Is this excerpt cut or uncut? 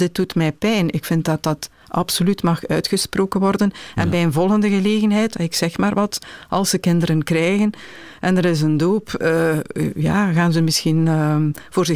uncut